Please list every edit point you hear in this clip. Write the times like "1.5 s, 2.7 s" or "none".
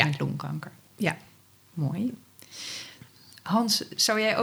none